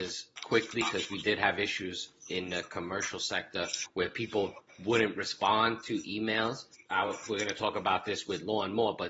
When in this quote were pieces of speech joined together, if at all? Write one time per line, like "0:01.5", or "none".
none